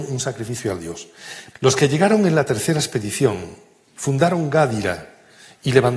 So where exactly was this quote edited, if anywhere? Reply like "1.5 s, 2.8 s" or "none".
1.5 s